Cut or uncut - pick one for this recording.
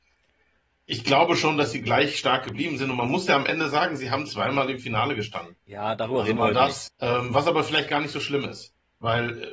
cut